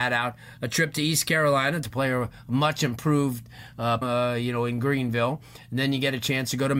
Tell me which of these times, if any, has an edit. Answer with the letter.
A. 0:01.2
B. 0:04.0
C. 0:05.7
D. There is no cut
B